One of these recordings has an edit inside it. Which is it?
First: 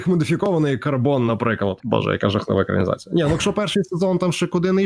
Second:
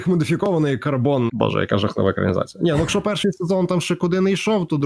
second; 1 cut; at 1.3 s

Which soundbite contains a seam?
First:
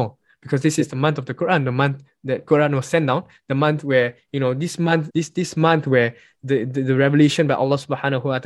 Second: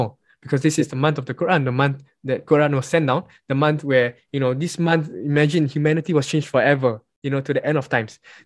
first; 1 cut; at 5.1 s

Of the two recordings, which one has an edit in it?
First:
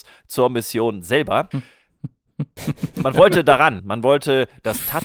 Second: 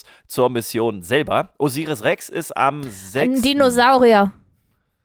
first; 2 cuts; at 1.5 s, 3.8 s

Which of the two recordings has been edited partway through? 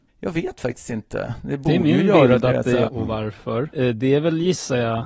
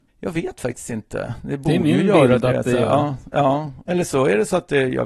first; 1 cut; at 2.9 s

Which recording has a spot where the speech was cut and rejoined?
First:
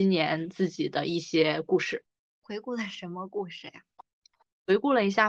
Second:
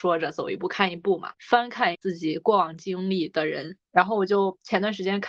second; 2 cuts; at 1.3 s, 3.9 s

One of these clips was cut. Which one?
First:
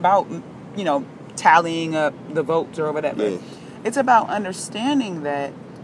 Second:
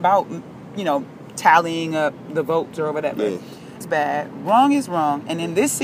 second; 1 cut; at 3.8 s

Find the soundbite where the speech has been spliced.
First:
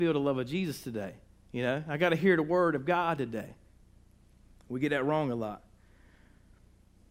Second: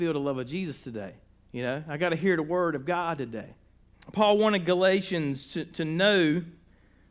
second; 1 cut; at 3.9 s

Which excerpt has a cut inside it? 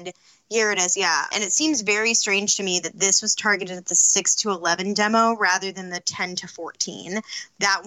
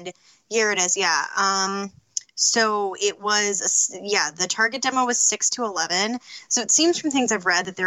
first; 1 cut; at 1.3 s

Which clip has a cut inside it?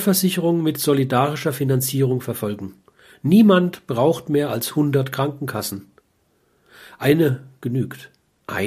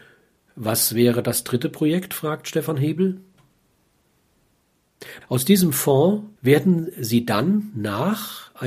second; 2 cuts; at 5.2 s, 6.4 s

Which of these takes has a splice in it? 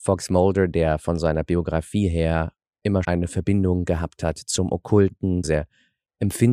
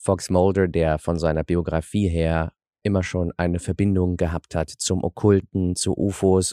first; 2 cuts; at 3.0 s, 5.4 s

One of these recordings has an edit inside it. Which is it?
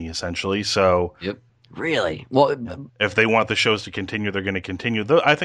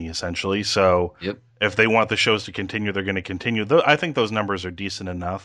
first; 2 cuts; at 1.5 s, 2.9 s

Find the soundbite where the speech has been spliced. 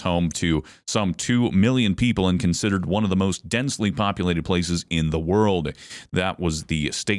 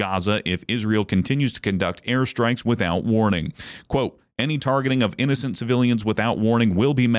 first; 1 cut; at 6.1 s

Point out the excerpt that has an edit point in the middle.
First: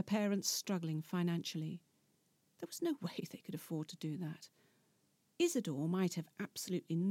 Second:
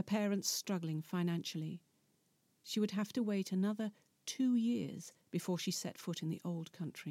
first; 2 cuts; at 2.4 s, 5.4 s

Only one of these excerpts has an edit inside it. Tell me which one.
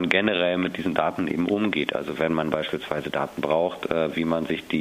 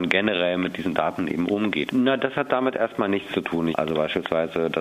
second; 2 cuts; at 1.9 s, 3.7 s

